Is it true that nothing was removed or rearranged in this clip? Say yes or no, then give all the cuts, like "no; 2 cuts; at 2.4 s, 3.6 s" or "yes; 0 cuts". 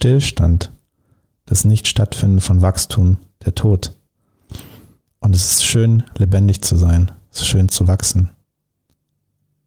yes; 0 cuts